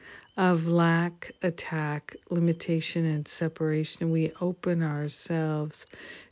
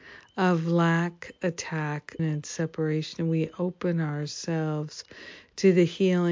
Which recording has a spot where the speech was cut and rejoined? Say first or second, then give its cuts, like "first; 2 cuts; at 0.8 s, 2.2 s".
second; 1 cut; at 2.2 s